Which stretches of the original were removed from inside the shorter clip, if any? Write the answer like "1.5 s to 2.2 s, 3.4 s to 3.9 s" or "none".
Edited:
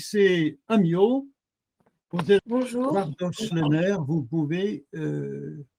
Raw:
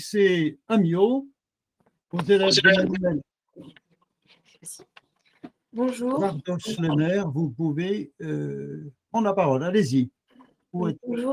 2.4 s to 5.7 s